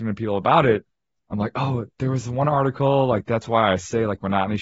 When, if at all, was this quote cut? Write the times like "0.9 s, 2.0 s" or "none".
none